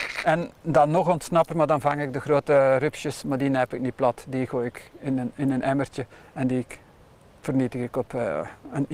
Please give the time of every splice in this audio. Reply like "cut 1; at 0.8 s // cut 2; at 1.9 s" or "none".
cut 1; at 1.5 s